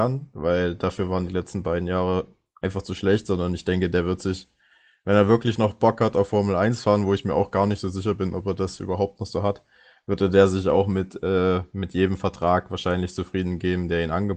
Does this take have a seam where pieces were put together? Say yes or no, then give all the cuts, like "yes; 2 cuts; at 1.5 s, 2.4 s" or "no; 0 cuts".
no; 0 cuts